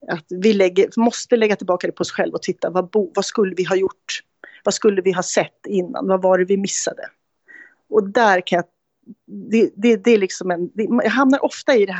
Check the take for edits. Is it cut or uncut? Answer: uncut